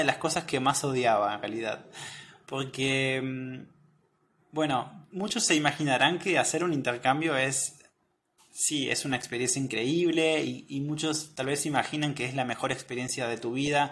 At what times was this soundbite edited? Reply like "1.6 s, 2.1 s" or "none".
none